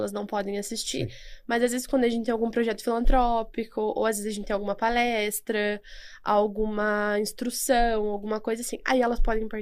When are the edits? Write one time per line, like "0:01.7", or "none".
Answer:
none